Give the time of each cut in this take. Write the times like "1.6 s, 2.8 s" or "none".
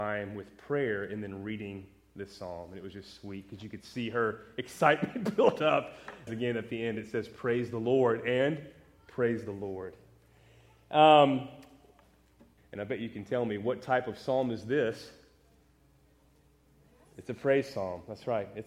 6.3 s, 12.6 s